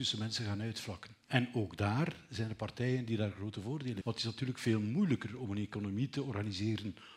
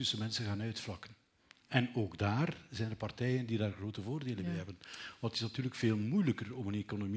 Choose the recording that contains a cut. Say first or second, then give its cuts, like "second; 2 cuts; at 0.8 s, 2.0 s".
first; 2 cuts; at 1.2 s, 4.0 s